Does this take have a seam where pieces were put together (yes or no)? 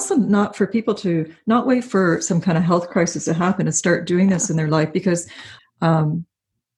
yes